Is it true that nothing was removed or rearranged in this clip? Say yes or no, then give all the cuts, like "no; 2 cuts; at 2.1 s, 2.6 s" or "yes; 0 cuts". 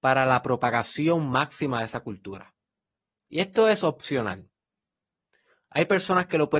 yes; 0 cuts